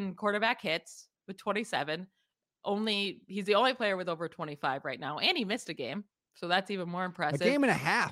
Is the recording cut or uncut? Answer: uncut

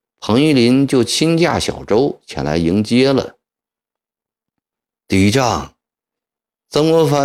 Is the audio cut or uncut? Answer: cut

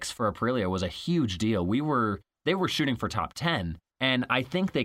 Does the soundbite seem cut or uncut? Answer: cut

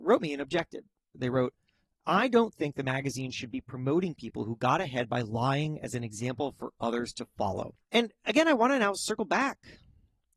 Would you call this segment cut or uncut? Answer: cut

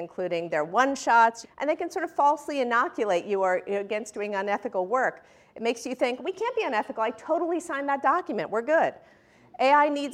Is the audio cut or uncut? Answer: cut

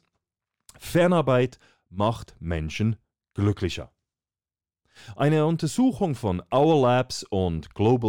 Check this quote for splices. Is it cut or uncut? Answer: uncut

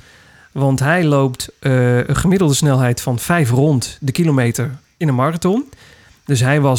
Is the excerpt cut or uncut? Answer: uncut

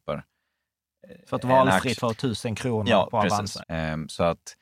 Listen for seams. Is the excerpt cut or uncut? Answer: cut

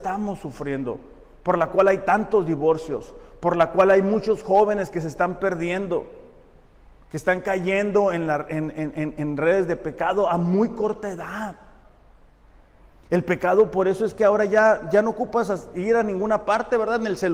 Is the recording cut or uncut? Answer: uncut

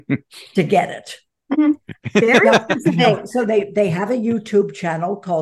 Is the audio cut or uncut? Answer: cut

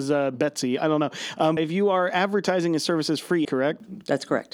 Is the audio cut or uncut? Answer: cut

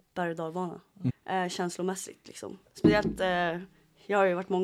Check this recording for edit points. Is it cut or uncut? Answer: cut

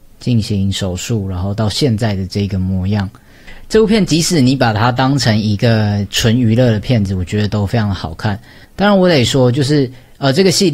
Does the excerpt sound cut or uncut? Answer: cut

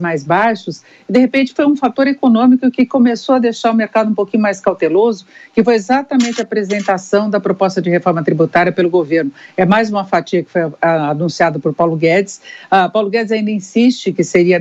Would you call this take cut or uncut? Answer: uncut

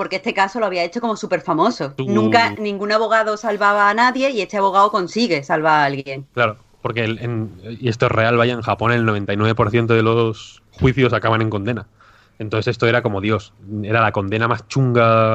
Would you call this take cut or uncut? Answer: cut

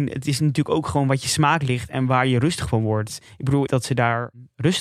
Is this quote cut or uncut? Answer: cut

